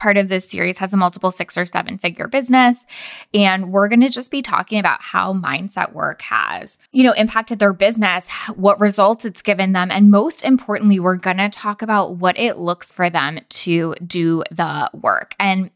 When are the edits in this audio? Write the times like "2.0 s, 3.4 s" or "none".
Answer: 6.9 s, 12.9 s